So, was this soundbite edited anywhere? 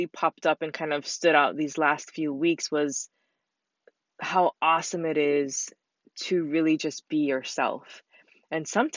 no; 0 cuts

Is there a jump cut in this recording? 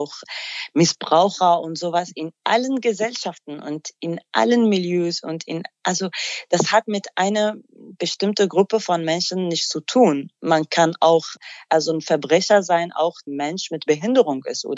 no; 0 cuts

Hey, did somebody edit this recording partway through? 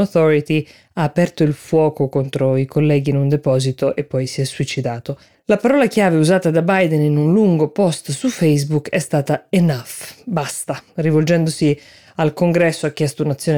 no; 0 cuts

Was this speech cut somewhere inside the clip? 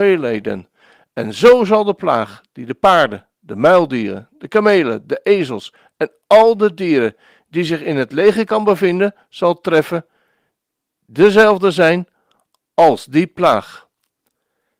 no; 0 cuts

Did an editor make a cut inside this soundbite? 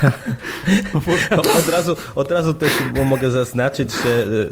yes; 1 cut; at 1.4 s

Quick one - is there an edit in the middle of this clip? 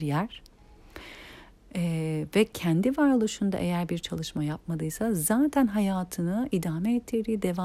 no; 0 cuts

